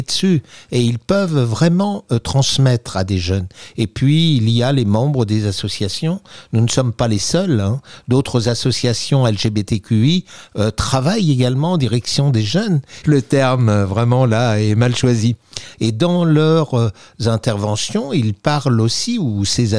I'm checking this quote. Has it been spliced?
yes; 2 cuts; at 13.0 s, 15.7 s

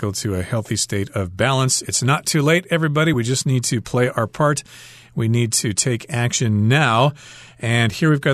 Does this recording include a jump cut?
no; 0 cuts

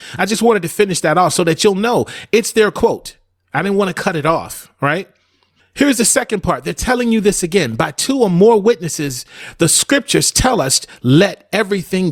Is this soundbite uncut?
yes; 0 cuts

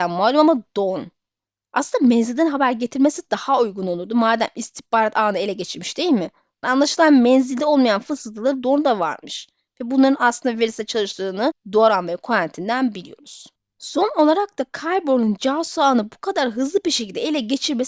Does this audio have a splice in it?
yes; 1 cut; at 6.6 s

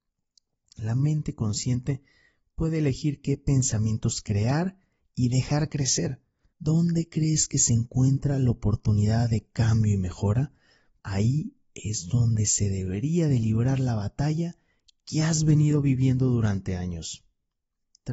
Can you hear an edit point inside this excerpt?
yes; 2 cuts; at 6.5 s, 11.0 s

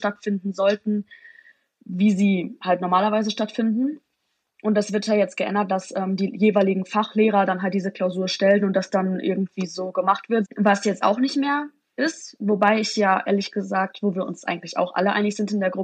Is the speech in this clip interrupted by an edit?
yes; 2 cuts; at 4.5 s, 10.5 s

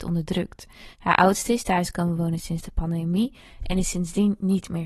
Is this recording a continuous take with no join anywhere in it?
no; 1 cut; at 0.9 s

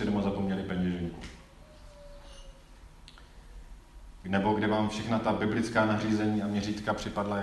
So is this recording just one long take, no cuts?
no; 1 cut; at 4.2 s

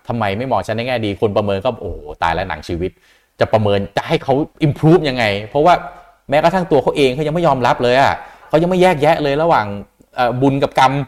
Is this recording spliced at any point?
yes; 1 cut; at 4.5 s

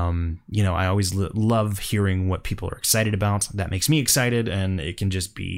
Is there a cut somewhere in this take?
no; 0 cuts

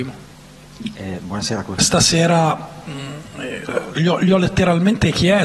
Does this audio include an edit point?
yes; 1 cut; at 1.8 s

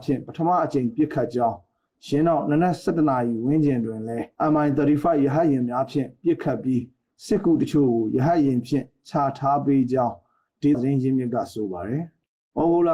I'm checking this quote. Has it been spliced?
yes; 1 cut; at 10.7 s

